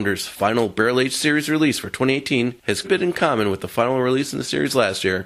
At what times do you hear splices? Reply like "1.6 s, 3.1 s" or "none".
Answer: 2.8 s